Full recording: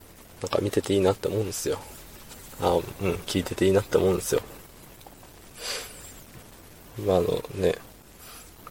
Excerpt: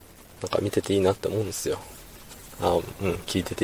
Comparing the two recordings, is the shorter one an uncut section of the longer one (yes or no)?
yes